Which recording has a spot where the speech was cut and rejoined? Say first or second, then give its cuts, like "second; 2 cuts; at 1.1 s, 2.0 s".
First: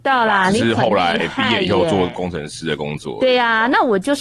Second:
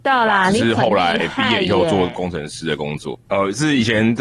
second; 1 cut; at 3.1 s